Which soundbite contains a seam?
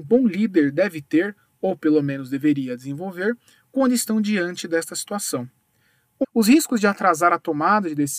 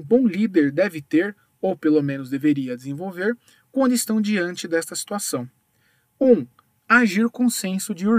first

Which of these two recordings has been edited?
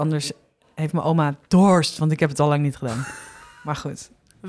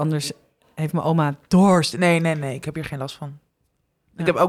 second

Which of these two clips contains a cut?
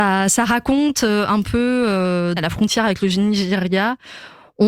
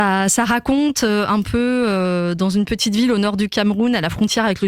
first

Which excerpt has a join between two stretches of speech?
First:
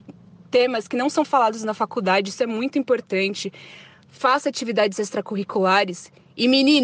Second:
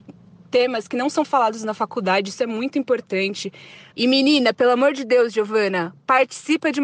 second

